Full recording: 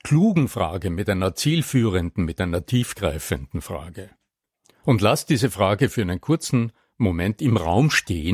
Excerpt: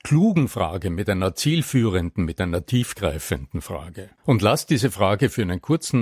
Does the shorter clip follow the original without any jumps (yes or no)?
no